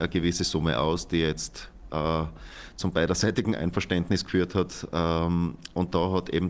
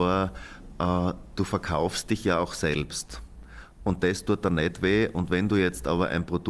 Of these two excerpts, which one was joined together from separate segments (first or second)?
second